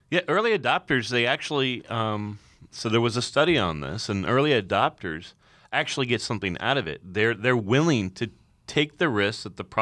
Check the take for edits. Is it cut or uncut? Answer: cut